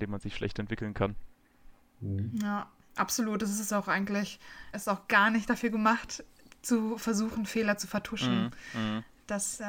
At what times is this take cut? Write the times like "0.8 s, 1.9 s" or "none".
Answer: 4.7 s